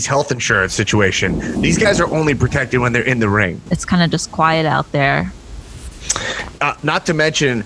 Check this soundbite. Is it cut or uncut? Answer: cut